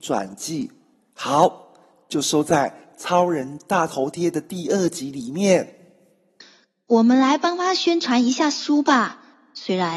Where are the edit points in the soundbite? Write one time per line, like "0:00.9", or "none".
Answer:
0:00.9